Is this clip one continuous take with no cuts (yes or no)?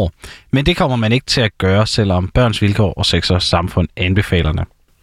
yes